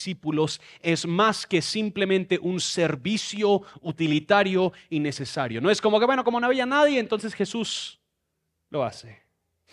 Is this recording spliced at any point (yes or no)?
no